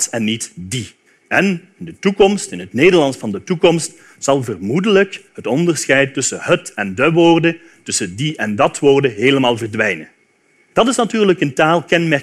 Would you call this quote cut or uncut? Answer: cut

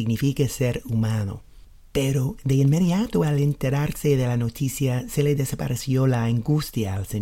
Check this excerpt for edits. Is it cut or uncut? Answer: cut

